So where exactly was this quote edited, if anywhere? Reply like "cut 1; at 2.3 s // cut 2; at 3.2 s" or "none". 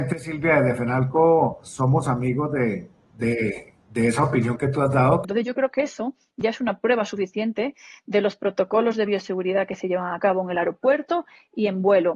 cut 1; at 5.2 s